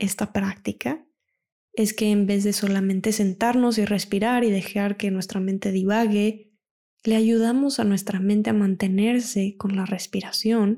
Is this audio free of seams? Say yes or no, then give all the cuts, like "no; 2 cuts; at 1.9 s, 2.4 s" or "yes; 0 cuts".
yes; 0 cuts